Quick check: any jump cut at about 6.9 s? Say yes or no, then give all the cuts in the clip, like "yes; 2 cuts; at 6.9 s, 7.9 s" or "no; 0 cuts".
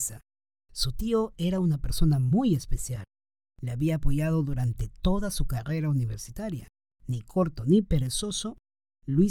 yes; 1 cut; at 6.9 s